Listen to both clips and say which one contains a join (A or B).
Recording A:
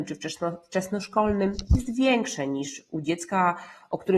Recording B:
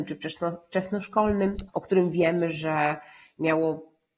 B